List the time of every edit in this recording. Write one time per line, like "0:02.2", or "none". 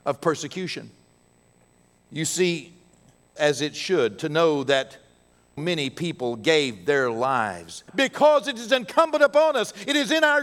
0:03.4
0:05.6
0:07.9